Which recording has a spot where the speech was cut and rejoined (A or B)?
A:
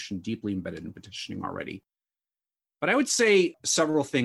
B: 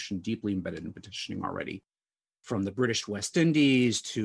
B